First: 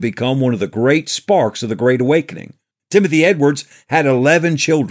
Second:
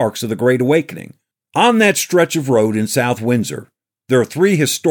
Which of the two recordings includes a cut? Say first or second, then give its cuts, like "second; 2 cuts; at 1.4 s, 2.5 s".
first; 1 cut; at 2.8 s